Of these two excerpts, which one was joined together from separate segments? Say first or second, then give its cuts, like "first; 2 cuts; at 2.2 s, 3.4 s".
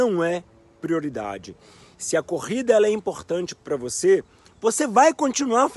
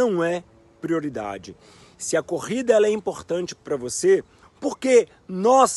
second; 1 cut; at 4.4 s